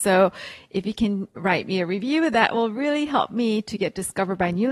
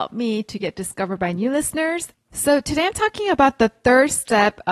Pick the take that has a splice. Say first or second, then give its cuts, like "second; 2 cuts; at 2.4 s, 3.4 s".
second; 1 cut; at 2.1 s